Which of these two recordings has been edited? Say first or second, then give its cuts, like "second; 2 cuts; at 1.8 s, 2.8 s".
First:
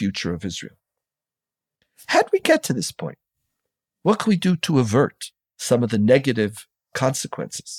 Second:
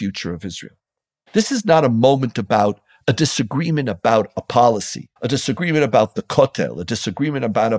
second; 2 cuts; at 1.3 s, 5.2 s